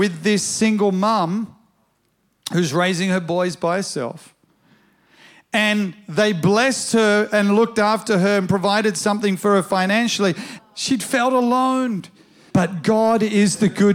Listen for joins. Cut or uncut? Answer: cut